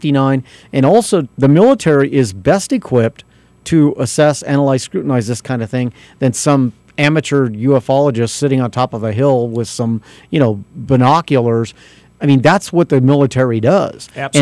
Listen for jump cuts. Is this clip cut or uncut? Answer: cut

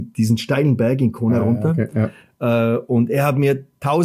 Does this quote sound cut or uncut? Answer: uncut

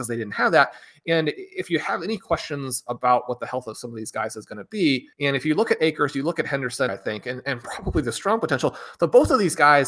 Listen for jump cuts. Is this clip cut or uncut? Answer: cut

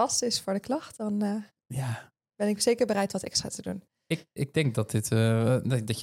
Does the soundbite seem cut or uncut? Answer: uncut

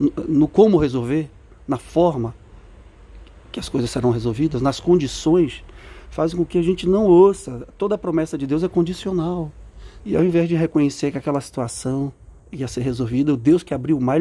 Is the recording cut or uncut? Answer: cut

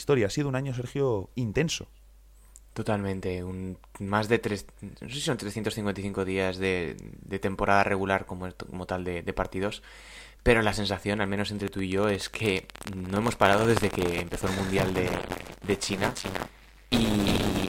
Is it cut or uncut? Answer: uncut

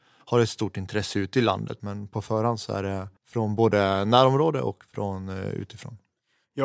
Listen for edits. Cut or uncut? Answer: cut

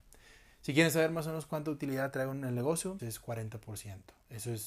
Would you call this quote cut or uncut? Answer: cut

